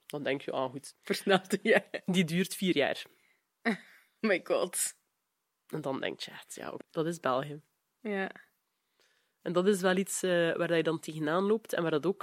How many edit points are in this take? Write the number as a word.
one